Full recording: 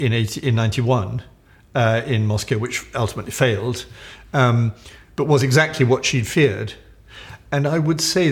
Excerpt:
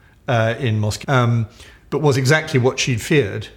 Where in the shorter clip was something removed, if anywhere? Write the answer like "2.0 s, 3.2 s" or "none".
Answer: 1.0 s